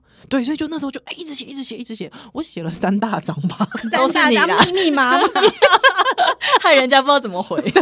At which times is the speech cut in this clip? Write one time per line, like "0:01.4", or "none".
0:03.9

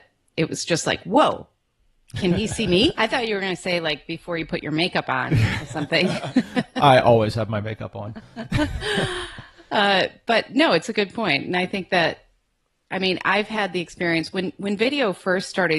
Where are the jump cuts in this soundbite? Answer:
0:02.9

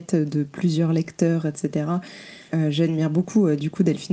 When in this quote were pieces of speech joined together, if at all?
0:02.5

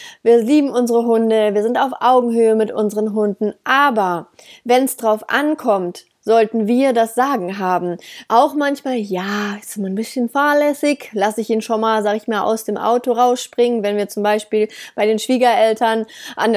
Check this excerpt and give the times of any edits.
0:08.3

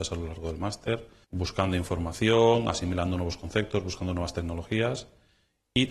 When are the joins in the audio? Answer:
0:01.2

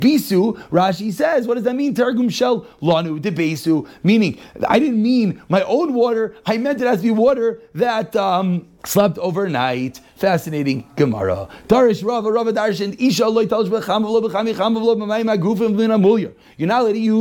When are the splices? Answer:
0:08.8

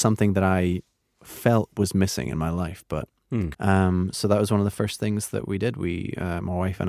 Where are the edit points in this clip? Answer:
0:03.5

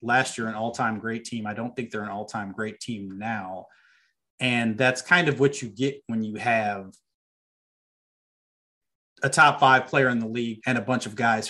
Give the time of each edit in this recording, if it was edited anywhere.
0:10.6

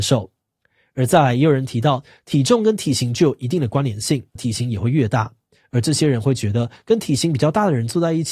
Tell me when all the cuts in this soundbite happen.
0:04.4

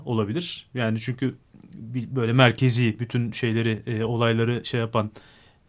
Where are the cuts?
none

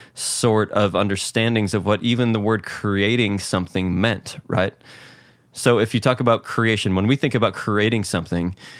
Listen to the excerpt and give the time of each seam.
none

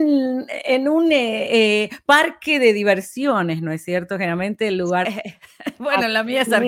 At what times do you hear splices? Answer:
0:05.0

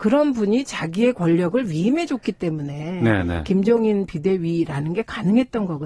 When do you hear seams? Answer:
none

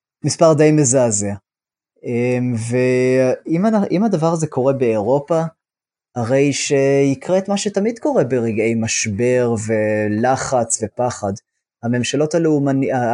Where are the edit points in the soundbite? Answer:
none

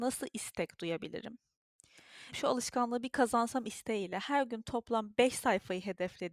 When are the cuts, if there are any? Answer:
0:02.3

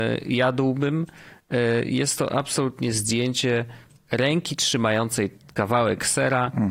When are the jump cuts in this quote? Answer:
0:04.0

